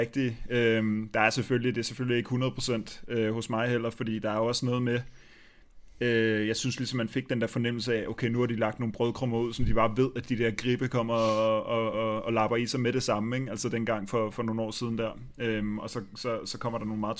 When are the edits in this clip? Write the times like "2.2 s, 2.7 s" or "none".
none